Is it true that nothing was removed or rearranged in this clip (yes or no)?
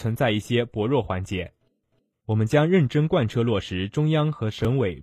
yes